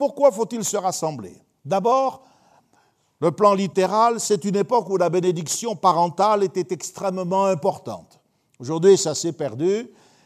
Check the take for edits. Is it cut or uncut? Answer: uncut